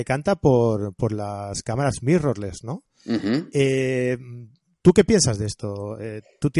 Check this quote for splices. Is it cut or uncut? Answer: uncut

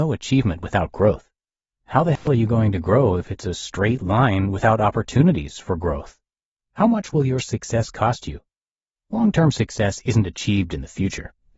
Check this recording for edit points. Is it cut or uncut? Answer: uncut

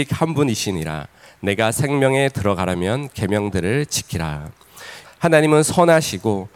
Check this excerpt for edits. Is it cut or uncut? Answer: cut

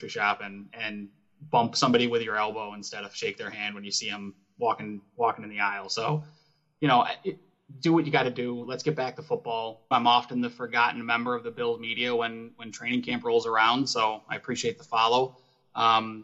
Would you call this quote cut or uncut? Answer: cut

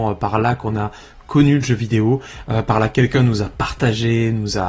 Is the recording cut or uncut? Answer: uncut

